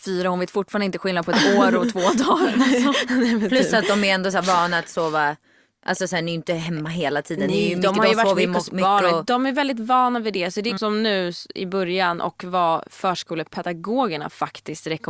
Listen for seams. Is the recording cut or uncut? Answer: cut